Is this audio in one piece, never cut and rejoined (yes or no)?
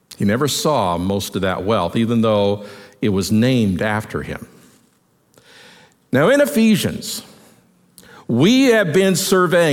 yes